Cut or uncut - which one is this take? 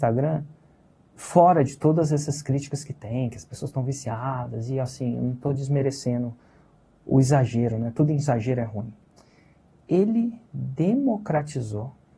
uncut